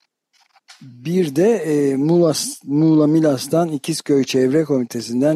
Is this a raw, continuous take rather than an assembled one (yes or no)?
yes